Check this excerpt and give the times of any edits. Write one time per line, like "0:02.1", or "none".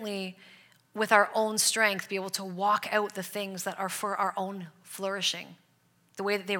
none